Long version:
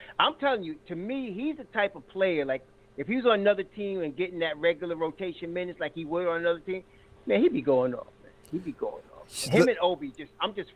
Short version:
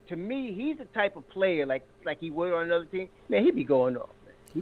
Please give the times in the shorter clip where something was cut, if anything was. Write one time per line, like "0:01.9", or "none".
0:02.0
0:03.2